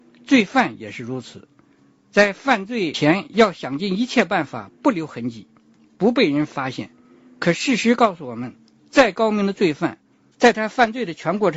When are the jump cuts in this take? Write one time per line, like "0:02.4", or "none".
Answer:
0:10.3